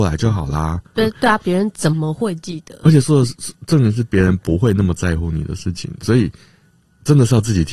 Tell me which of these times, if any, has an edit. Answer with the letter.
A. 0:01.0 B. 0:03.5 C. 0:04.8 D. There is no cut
A